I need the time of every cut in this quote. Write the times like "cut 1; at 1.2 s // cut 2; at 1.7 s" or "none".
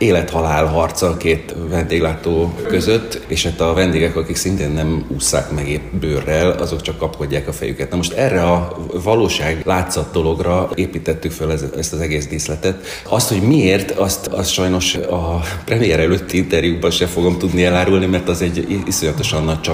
none